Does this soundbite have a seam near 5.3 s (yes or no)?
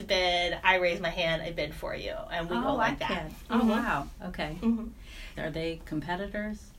yes